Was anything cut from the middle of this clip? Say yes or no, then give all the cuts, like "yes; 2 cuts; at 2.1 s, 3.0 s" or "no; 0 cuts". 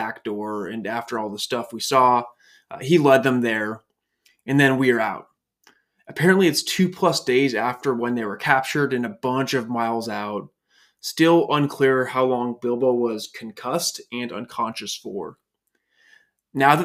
no; 0 cuts